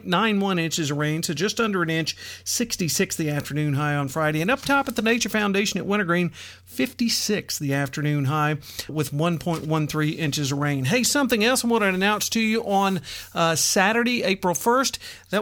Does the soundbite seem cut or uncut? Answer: cut